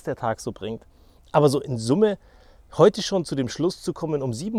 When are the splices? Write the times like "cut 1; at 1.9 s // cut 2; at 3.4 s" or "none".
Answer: none

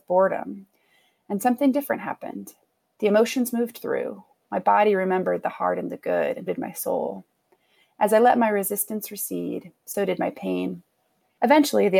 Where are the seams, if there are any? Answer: cut 1; at 6.5 s

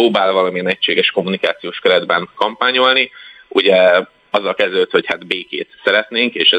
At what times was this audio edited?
none

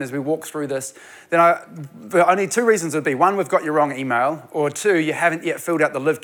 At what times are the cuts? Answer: none

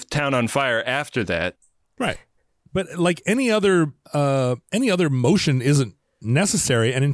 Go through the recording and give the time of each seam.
cut 1; at 4.0 s

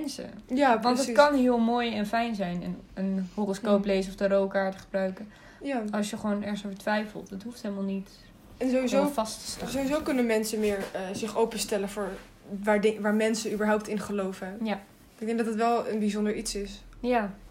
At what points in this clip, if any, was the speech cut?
none

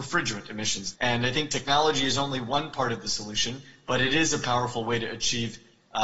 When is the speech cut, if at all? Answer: cut 1; at 0.9 s

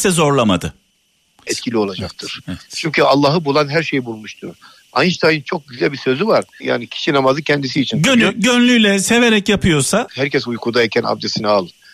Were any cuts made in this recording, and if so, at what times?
cut 1; at 1.5 s // cut 2; at 6.6 s // cut 3; at 10.1 s

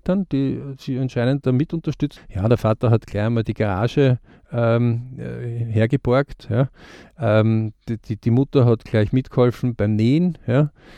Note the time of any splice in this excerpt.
cut 1; at 2.2 s

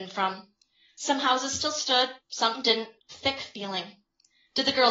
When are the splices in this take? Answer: cut 1; at 3.1 s

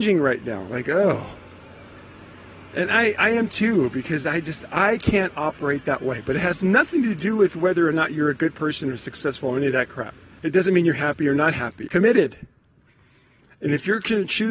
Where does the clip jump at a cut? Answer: cut 1; at 10.4 s // cut 2; at 11.9 s

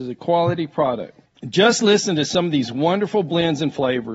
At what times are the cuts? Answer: cut 1; at 1.3 s

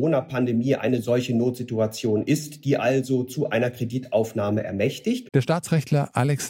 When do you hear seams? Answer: cut 1; at 5.3 s

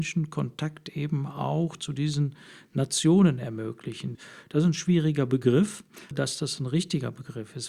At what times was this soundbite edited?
cut 1; at 4.1 s // cut 2; at 6.1 s

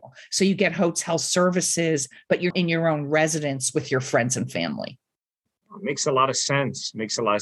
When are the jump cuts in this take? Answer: cut 1; at 2.5 s

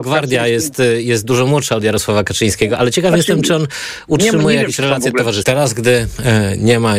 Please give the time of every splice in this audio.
cut 1; at 5.4 s

